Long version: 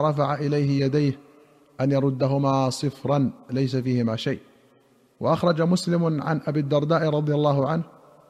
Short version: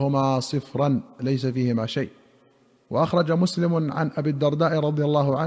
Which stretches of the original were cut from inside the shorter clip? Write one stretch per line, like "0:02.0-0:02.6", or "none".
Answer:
none